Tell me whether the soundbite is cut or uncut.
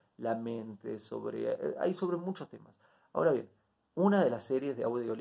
uncut